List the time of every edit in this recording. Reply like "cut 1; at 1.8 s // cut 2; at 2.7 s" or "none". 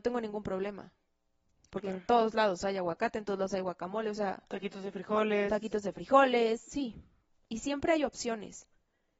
cut 1; at 7.5 s